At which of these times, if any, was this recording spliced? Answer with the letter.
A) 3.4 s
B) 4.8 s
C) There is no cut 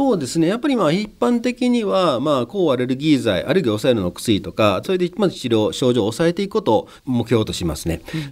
B